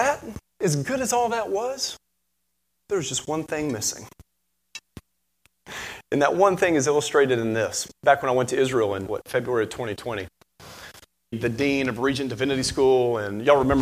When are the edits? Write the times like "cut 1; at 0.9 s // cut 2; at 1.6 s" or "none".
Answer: cut 1; at 9.1 s // cut 2; at 11.3 s